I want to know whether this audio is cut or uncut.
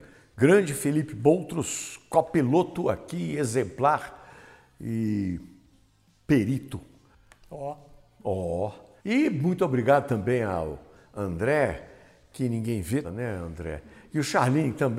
cut